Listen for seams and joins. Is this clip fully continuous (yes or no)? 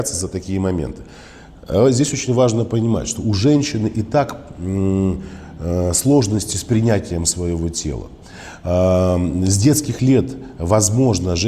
yes